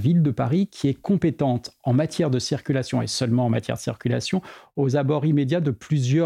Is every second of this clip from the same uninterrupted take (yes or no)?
yes